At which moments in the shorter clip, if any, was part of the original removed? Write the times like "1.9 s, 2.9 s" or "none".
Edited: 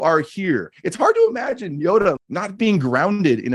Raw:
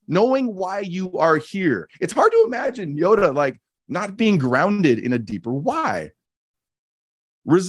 2.2 s